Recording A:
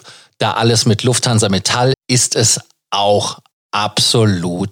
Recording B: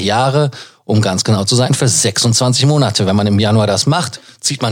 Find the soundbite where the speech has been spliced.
A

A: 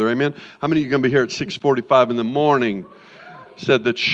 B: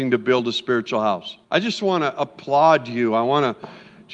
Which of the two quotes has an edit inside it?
B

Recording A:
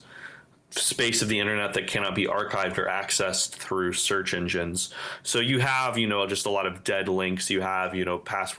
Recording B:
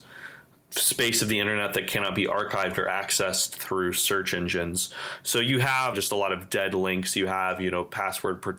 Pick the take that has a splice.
B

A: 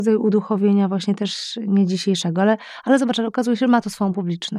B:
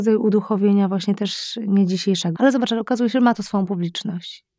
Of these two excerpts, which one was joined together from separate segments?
B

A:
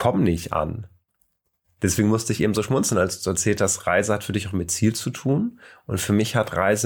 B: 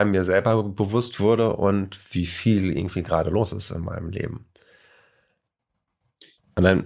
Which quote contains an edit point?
A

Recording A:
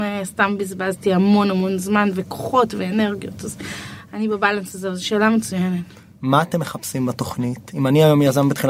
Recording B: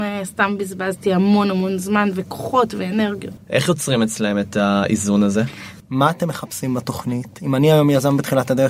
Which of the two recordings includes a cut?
B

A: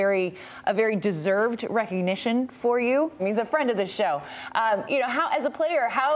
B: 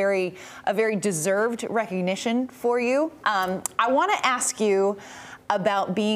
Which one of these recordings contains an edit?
A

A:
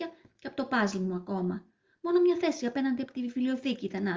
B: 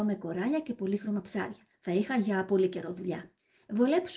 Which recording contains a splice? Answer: B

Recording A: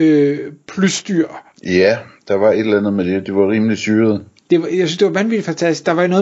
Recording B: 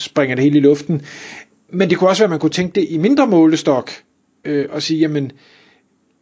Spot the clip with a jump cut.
A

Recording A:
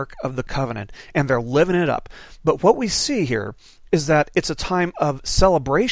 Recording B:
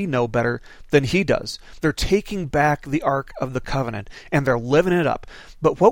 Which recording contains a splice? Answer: B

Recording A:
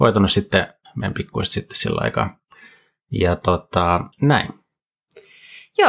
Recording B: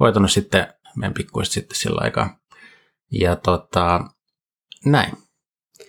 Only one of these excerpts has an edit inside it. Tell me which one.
A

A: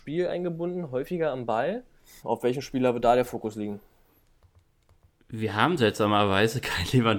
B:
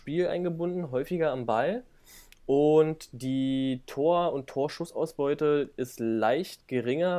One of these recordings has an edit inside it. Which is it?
A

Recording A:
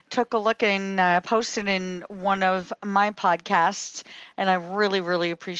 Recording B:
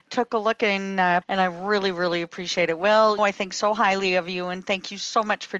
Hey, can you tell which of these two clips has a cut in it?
B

